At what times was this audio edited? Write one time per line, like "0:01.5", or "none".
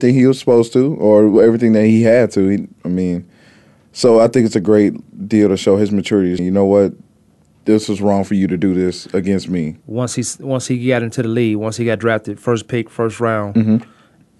0:06.4
0:09.8